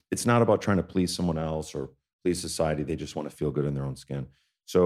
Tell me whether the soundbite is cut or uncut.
uncut